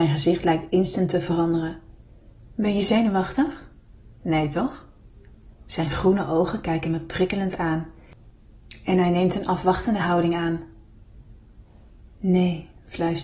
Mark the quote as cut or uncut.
cut